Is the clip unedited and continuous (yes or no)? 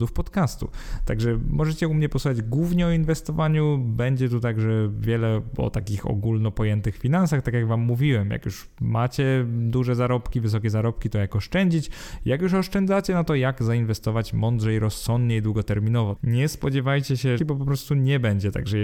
no